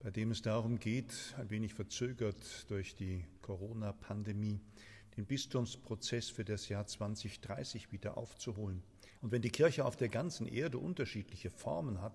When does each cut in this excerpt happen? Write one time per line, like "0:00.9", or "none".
0:09.2